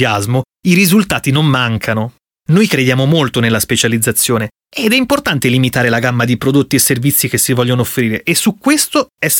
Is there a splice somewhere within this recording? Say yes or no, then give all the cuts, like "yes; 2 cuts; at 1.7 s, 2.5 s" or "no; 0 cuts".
yes; 1 cut; at 2.3 s